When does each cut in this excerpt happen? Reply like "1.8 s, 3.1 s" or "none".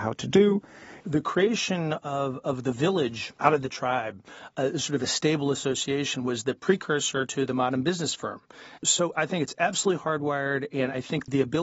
1.0 s, 8.8 s